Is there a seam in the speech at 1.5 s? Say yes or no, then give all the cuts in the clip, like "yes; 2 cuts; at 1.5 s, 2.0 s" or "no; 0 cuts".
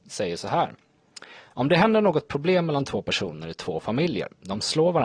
yes; 1 cut; at 1.5 s